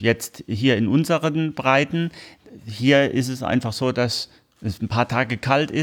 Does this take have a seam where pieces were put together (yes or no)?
no